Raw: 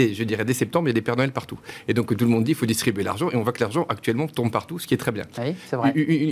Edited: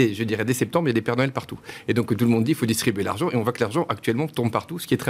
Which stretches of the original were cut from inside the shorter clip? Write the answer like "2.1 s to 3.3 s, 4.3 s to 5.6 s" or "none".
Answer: none